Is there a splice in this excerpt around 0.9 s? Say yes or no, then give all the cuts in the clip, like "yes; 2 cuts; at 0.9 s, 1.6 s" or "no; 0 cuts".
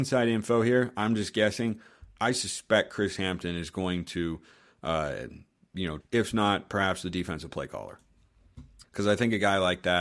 no; 2 cuts; at 6.0 s, 8.8 s